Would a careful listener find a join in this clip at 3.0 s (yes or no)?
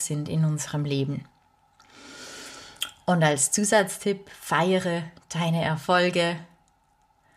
no